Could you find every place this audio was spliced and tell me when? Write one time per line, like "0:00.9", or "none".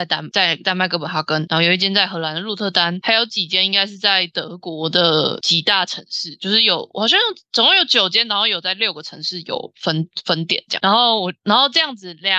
none

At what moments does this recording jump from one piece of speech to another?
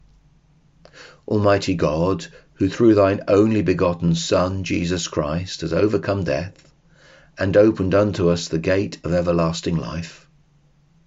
none

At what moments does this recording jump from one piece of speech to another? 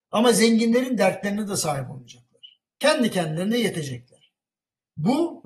0:02.7

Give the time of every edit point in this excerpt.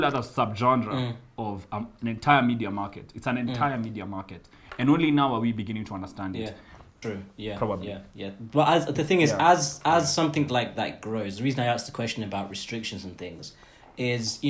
0:07.0

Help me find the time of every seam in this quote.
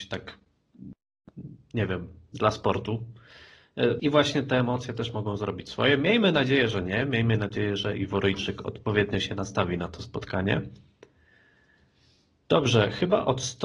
0:04.0

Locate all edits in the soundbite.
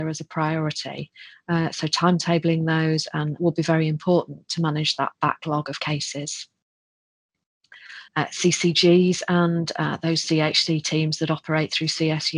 0:03.4
0:08.1

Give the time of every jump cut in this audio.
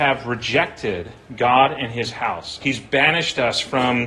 0:02.6

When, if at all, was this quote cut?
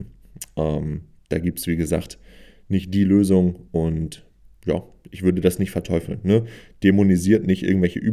none

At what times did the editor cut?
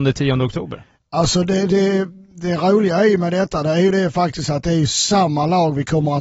none

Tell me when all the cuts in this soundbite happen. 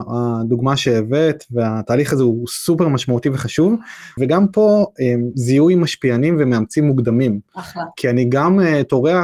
0:04.2

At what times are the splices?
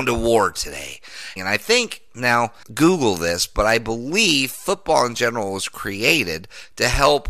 0:01.4
0:02.6

